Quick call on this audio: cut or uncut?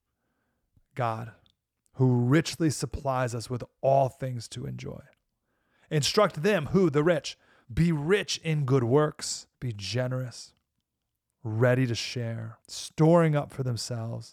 cut